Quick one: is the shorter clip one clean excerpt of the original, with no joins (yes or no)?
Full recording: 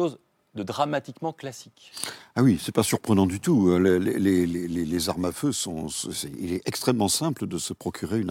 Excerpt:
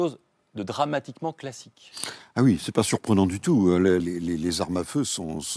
no